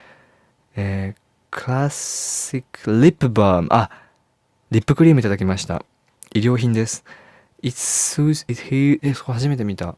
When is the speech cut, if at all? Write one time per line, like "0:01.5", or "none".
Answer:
0:09.0

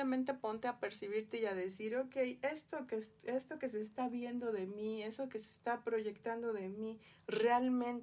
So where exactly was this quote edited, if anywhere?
none

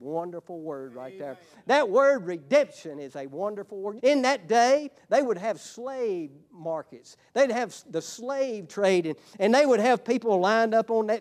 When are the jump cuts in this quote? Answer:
0:04.0

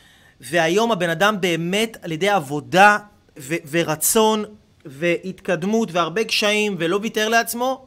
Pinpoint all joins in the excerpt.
0:03.4

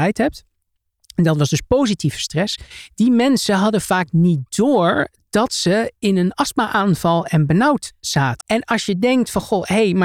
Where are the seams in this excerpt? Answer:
0:08.4

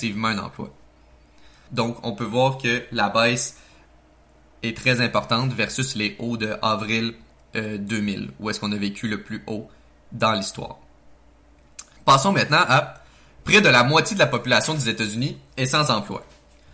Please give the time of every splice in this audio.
0:01.7
0:12.0

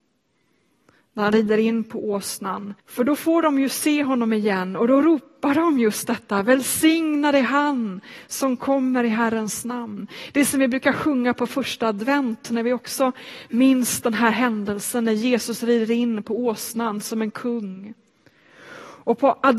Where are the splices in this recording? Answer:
0:02.8

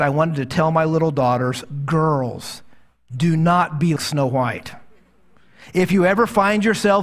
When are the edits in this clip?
0:04.0

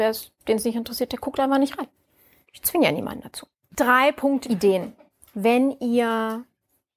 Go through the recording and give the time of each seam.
0:04.4

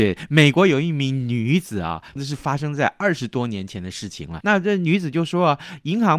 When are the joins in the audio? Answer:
0:02.2
0:04.4

